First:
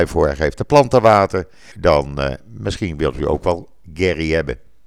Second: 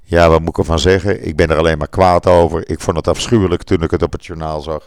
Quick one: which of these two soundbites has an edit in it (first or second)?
first